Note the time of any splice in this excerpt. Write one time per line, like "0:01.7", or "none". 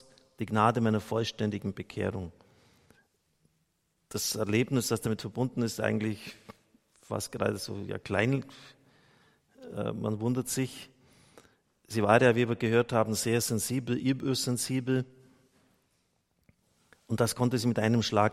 none